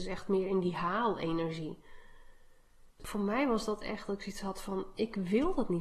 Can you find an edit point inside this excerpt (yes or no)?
yes